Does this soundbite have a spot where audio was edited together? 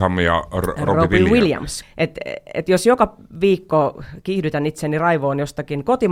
yes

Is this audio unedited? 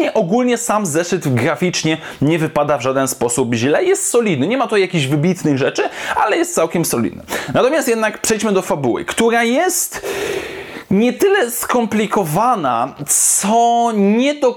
yes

